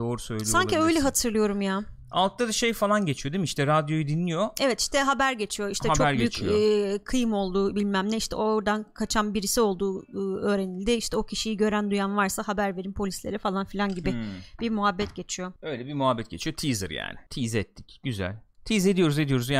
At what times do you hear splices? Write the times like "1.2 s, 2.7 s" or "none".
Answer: 15.6 s, 17.3 s